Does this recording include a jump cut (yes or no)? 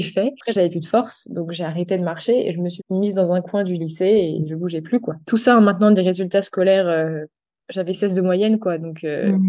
yes